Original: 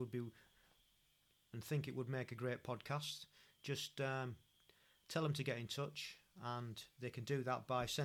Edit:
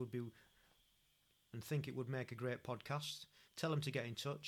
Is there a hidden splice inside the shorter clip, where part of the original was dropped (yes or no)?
yes